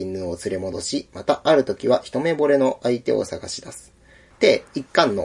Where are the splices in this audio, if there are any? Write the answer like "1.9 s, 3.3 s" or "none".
4.3 s